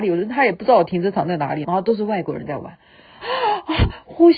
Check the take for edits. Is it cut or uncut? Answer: cut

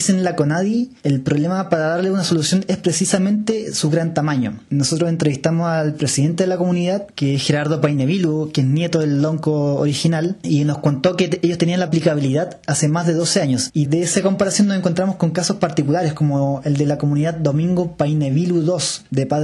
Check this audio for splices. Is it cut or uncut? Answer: cut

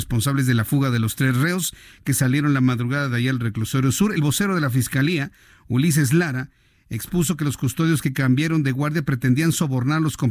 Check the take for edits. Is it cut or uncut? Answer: uncut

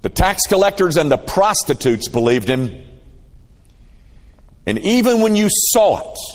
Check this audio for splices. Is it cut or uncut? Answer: uncut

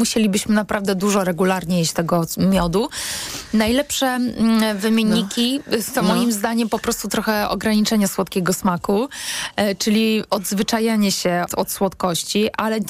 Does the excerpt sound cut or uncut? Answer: cut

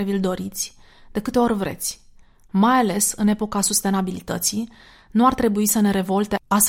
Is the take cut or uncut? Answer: uncut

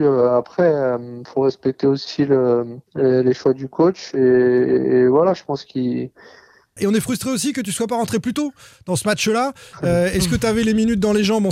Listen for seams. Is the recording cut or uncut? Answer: cut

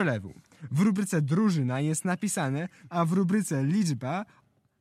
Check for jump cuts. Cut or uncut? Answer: cut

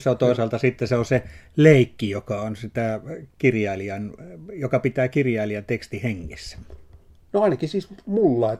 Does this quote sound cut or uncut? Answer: uncut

